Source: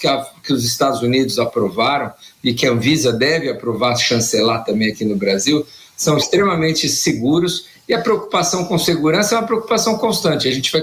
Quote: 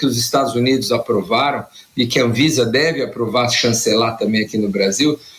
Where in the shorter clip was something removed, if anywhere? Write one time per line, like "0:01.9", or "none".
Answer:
none